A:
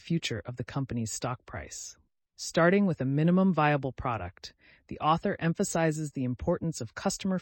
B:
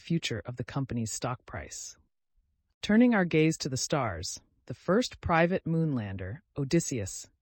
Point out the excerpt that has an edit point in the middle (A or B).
A